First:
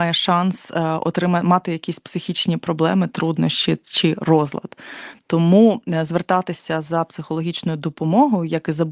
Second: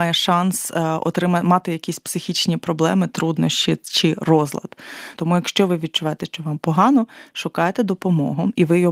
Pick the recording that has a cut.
second; 1 cut; at 5.2 s

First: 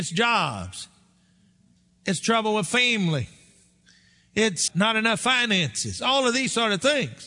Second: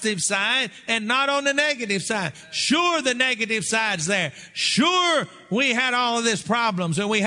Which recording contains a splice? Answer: first; 1 cut; at 4.7 s

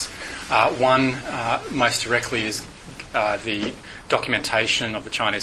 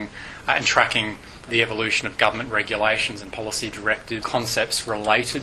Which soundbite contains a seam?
second; 2 cuts; at 1.5 s, 4.2 s

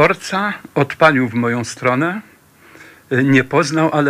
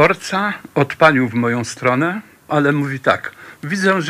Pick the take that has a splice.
second; 1 cut; at 2.5 s

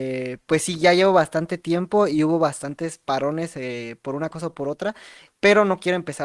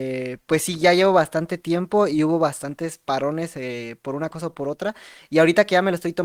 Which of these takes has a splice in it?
first; 1 cut; at 5.3 s

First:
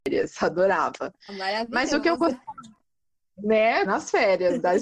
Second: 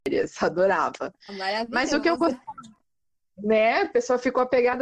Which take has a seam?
first; 1 cut; at 3.8 s

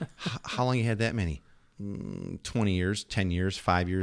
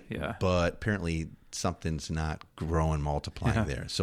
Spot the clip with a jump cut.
second; 1 cut; at 2.5 s

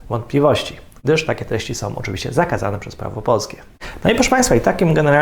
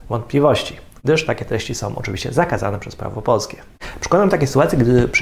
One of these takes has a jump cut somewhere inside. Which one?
first; 1 cut; at 4.0 s

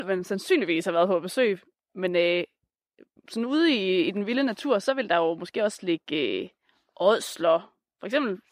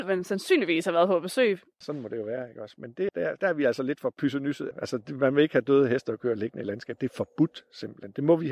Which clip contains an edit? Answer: second; 3 cuts; at 1.8 s, 3.1 s, 4.7 s

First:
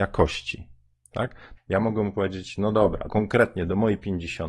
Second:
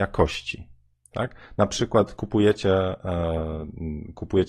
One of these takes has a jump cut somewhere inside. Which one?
first; 2 cuts; at 1.6 s, 3.1 s

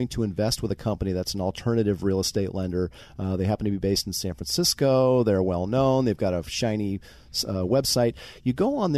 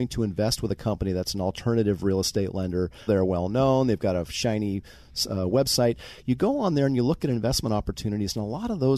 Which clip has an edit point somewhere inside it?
second; 1 cut; at 3.1 s

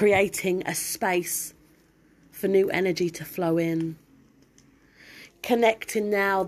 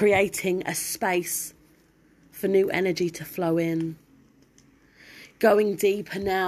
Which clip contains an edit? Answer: first; 1 cut; at 5.3 s

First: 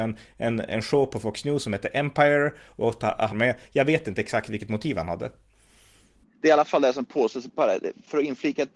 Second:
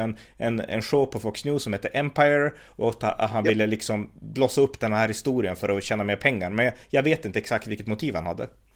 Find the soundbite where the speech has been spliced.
first; 1 cut; at 3.3 s

